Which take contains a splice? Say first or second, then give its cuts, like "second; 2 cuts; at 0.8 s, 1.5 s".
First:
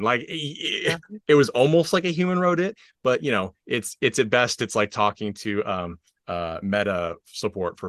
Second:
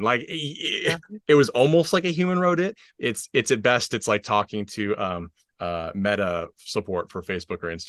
second; 1 cut; at 2.9 s